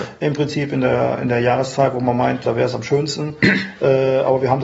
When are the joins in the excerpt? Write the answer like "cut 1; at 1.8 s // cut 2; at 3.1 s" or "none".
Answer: cut 1; at 2.4 s

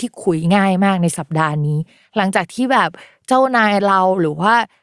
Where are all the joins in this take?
none

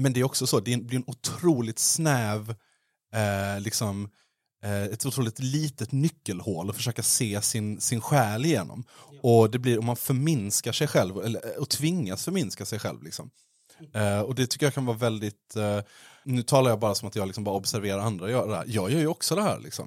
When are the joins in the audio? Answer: none

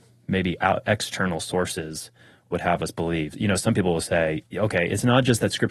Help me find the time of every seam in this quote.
cut 1; at 3.3 s // cut 2; at 4.4 s

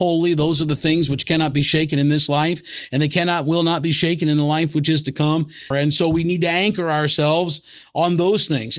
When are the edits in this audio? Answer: cut 1; at 5.7 s

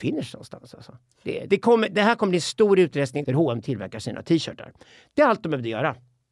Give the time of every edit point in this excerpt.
cut 1; at 1.5 s // cut 2; at 3.2 s

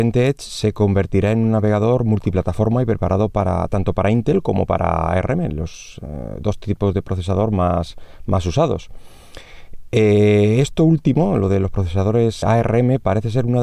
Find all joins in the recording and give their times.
cut 1; at 12.4 s

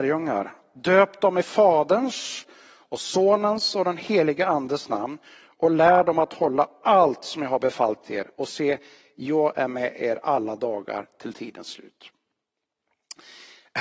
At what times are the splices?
none

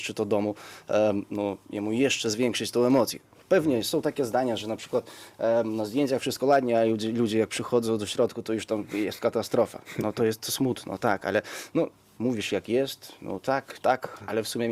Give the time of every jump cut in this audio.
cut 1; at 12.2 s // cut 2; at 13.8 s

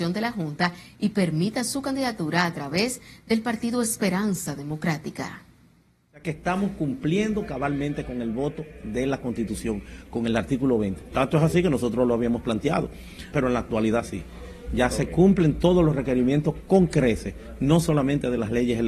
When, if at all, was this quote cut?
cut 1; at 11.1 s // cut 2; at 13.3 s

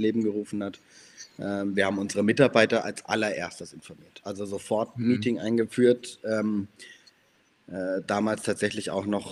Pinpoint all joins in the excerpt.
none

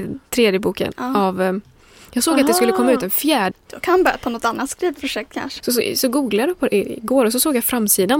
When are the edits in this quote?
cut 1; at 3.5 s // cut 2; at 5.6 s

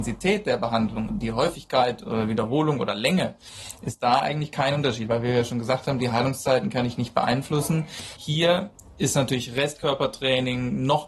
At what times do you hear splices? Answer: cut 1; at 1.1 s // cut 2; at 8.2 s

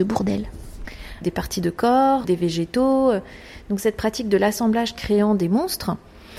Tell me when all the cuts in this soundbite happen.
cut 1; at 1.2 s // cut 2; at 2.2 s

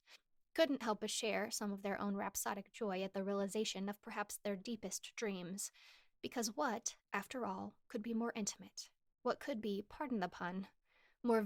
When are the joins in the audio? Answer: none

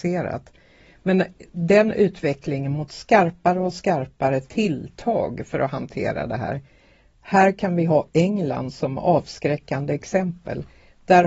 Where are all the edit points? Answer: none

